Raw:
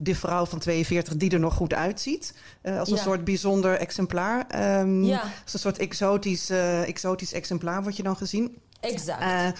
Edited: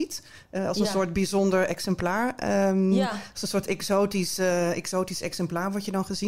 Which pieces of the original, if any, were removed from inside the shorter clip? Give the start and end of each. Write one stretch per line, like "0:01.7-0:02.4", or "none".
none